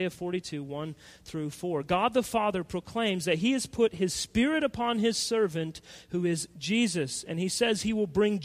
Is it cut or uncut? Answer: uncut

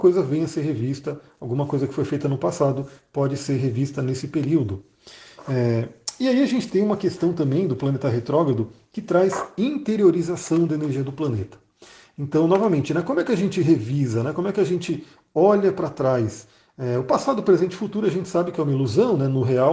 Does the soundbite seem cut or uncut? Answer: uncut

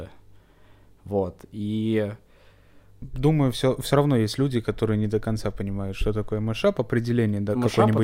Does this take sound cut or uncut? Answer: uncut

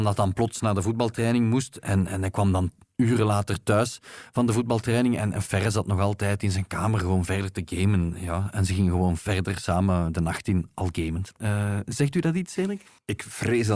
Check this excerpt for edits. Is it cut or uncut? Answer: cut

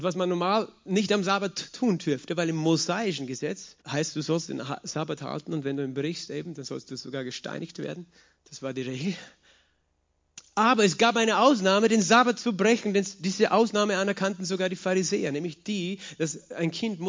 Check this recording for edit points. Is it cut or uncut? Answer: cut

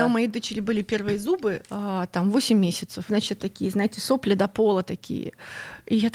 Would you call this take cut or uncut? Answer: cut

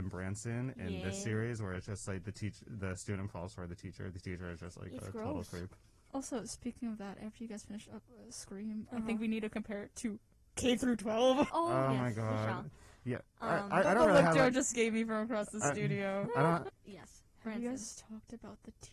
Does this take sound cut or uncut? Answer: cut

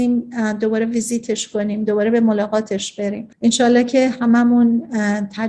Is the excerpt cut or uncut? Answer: cut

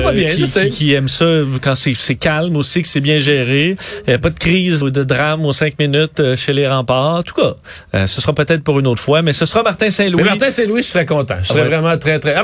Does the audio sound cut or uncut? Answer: cut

